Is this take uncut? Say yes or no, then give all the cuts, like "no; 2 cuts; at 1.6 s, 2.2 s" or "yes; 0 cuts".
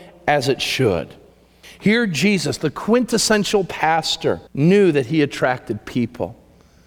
no; 2 cuts; at 1.6 s, 4.5 s